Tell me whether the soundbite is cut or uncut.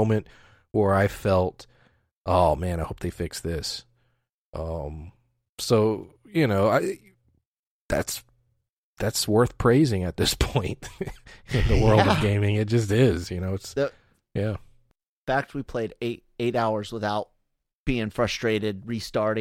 uncut